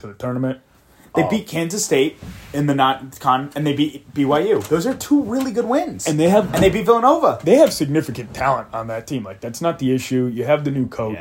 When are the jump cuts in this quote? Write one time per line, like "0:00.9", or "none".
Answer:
none